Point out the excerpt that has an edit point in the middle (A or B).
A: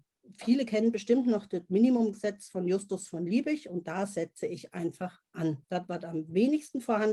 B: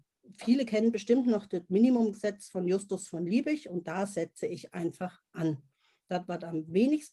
A